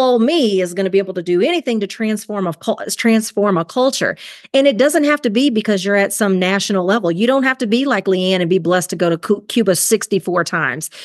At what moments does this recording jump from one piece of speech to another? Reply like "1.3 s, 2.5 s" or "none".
none